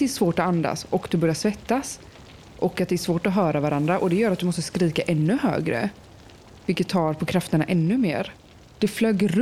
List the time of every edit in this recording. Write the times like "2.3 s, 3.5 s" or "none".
none